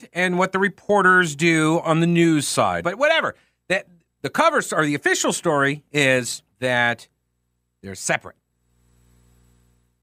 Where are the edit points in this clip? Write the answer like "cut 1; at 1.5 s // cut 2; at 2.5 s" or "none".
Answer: cut 1; at 2.8 s // cut 2; at 6.5 s